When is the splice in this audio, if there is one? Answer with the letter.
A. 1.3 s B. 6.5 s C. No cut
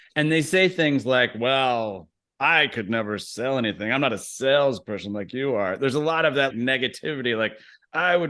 B